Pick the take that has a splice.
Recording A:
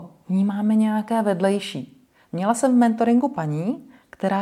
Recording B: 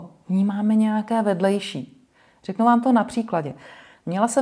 A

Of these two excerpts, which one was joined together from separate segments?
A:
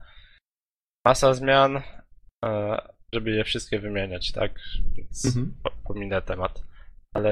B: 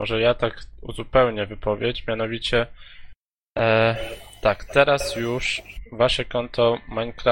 A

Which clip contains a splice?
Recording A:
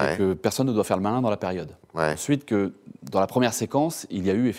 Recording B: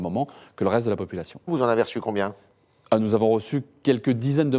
B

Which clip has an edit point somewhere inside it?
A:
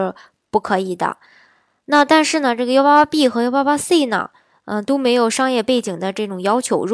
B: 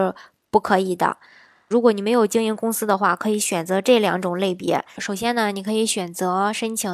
B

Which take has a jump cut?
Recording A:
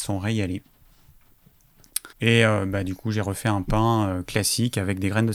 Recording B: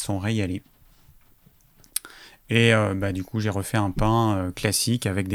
A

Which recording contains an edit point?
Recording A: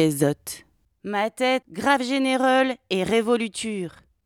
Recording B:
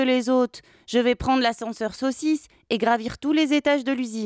A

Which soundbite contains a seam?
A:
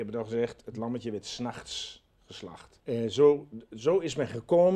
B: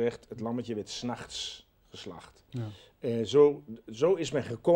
A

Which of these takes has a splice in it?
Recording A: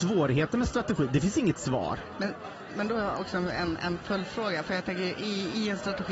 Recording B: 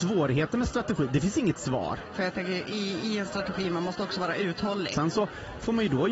B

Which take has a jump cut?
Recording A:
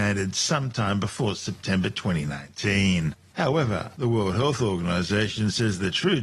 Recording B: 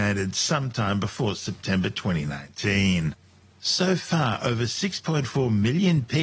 A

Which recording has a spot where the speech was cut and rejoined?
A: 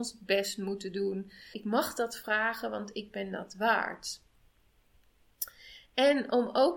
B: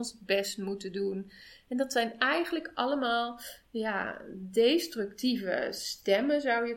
A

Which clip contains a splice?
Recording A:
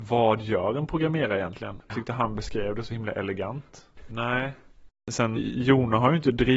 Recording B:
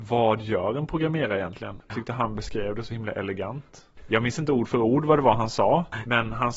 A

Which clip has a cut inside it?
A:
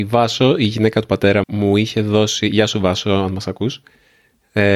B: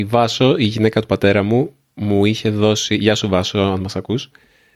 A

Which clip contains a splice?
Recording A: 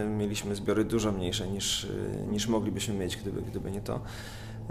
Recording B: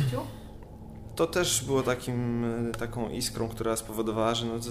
B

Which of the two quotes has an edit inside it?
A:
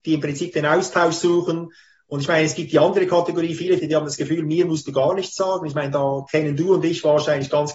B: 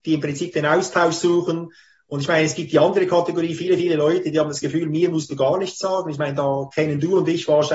A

